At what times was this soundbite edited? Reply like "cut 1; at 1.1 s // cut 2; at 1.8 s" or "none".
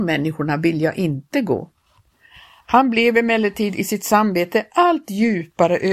none